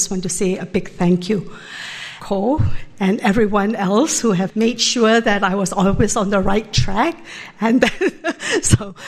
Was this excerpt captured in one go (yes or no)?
no